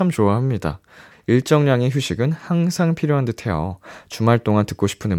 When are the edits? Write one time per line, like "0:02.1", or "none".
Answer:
0:01.1